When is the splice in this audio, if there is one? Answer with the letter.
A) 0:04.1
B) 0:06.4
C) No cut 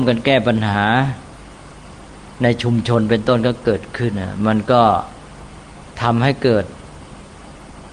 A